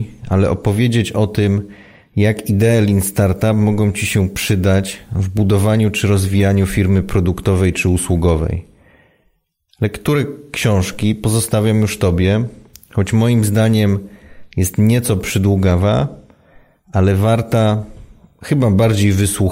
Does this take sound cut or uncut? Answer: cut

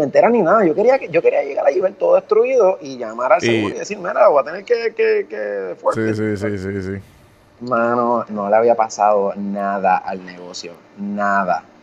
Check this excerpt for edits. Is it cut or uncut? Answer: cut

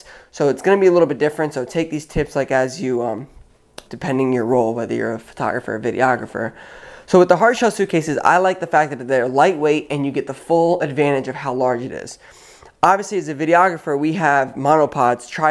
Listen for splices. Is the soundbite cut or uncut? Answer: cut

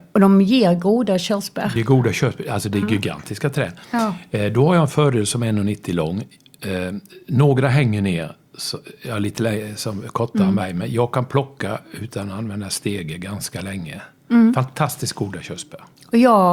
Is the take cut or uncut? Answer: uncut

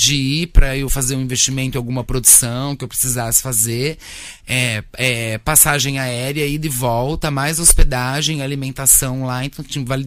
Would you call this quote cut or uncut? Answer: uncut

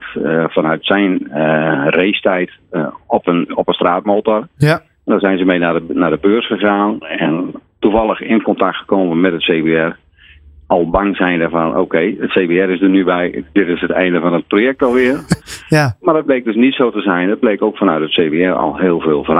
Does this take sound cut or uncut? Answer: uncut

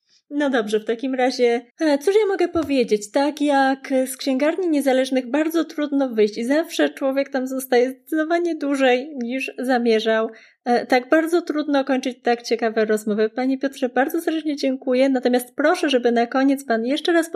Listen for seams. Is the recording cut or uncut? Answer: cut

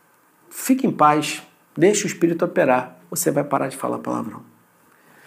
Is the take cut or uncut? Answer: cut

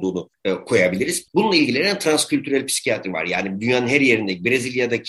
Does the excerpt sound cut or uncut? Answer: cut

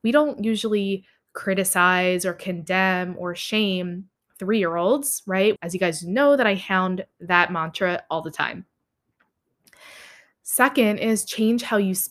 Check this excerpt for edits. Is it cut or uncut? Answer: cut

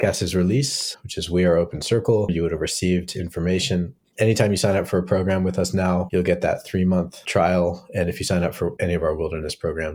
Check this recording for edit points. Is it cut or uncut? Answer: cut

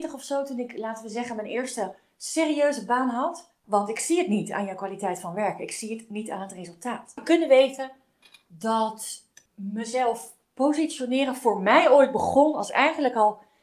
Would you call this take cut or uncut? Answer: cut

